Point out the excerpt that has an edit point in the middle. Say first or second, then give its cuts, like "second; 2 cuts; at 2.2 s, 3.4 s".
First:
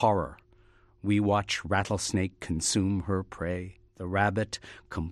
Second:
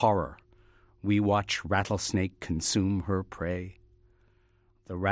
first; 1 cut; at 3.9 s